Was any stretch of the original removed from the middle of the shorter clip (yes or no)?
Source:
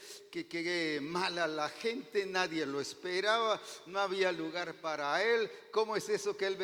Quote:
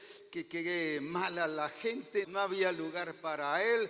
yes